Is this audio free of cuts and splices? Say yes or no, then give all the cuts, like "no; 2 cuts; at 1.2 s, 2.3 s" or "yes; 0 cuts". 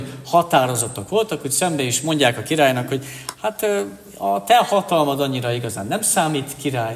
yes; 0 cuts